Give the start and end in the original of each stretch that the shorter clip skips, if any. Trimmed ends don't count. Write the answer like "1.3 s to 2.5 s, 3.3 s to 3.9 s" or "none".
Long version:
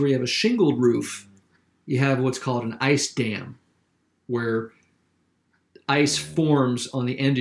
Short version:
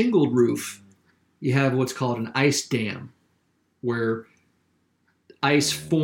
none

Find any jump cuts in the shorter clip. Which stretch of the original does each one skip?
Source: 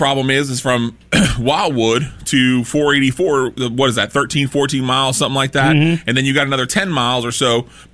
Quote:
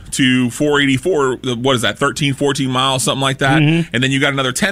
none

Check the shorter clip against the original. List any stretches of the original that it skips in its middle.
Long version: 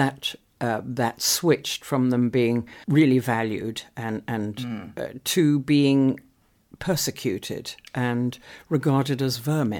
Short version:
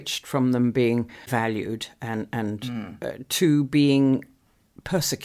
2.8 s to 3.2 s

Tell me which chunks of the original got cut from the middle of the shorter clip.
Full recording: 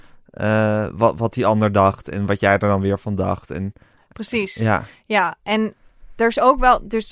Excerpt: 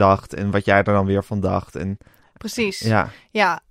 none

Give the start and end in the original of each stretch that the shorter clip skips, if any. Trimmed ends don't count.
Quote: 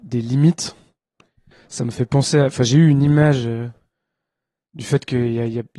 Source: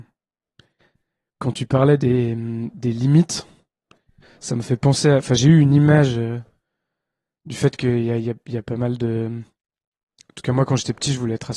none

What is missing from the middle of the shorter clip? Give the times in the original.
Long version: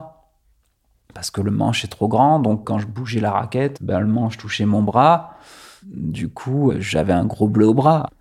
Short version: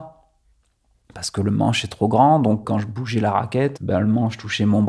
none

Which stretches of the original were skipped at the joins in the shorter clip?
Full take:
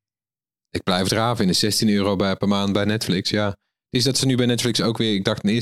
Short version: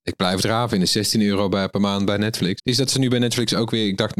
3.2 s to 3.8 s

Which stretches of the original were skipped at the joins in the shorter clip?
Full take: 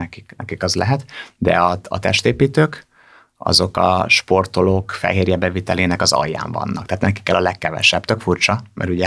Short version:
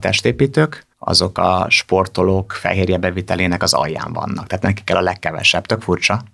2.9 s to 3.3 s

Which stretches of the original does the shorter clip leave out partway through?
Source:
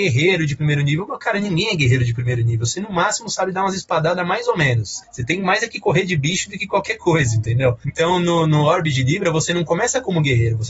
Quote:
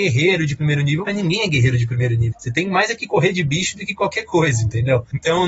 1.1 s to 1.3 s, 2.6 s to 5.0 s

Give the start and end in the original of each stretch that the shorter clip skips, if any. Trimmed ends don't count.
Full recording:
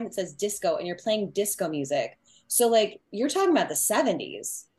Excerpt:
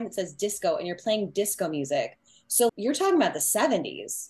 2.7 s to 3.0 s

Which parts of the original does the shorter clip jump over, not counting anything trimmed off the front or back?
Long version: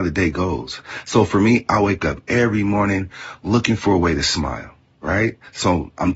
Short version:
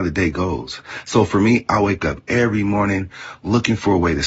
none

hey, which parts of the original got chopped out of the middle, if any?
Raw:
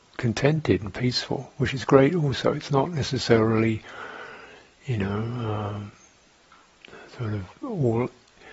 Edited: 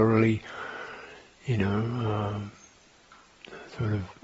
none

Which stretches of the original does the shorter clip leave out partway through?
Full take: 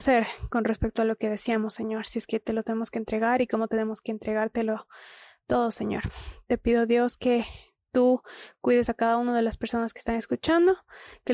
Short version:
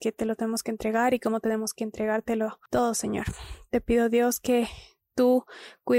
4.9 s to 5.4 s

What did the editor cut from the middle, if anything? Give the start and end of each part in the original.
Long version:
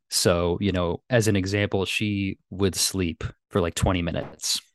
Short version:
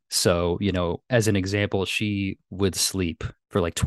none

